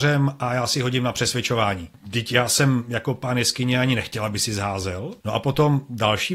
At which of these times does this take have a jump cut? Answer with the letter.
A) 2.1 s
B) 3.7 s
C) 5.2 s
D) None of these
C